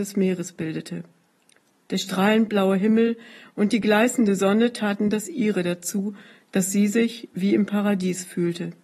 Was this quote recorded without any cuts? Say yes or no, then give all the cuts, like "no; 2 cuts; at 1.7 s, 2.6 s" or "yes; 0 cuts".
yes; 0 cuts